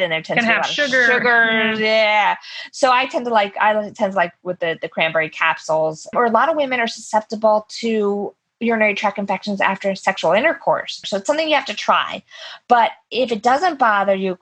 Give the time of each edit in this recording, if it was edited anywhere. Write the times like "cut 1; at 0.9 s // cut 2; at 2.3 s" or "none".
cut 1; at 6.1 s // cut 2; at 11.0 s